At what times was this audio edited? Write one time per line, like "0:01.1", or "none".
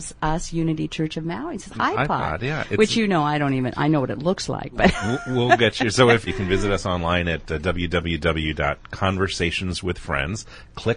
0:01.7
0:06.3